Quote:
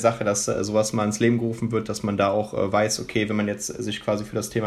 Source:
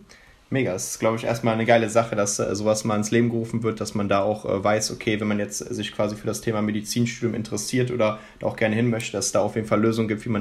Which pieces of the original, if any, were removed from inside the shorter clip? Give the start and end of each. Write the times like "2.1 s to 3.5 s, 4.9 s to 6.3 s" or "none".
none